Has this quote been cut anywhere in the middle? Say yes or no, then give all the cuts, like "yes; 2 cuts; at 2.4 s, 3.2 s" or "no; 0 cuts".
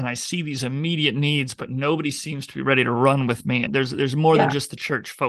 yes; 1 cut; at 3.7 s